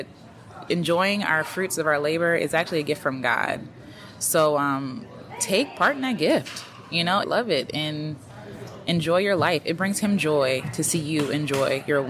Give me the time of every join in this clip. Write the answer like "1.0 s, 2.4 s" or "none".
7.2 s